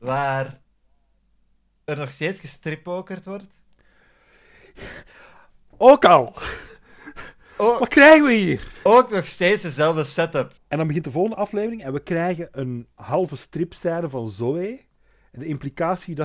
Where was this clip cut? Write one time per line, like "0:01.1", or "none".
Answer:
0:10.6
0:12.9